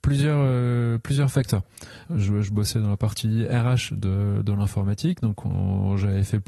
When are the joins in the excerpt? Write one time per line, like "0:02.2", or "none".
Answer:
0:02.0